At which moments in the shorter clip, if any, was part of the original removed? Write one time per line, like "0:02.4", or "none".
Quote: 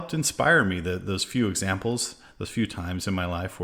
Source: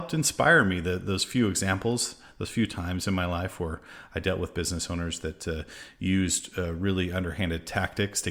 none